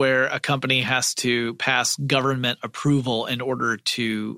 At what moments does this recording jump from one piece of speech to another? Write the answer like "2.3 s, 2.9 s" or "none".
none